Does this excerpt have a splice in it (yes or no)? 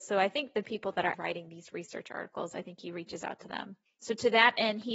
yes